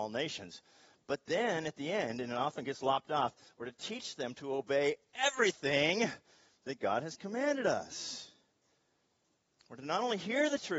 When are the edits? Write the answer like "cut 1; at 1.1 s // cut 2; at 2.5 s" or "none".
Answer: none